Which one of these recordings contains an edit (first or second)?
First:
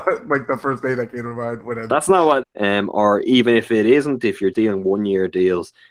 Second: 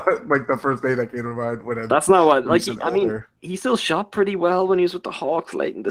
first